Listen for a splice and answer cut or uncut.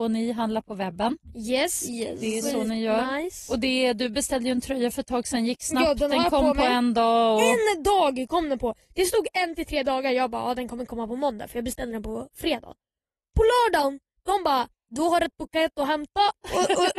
uncut